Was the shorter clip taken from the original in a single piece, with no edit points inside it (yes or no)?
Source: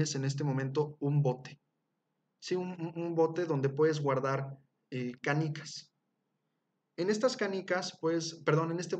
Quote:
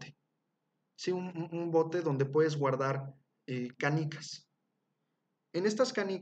yes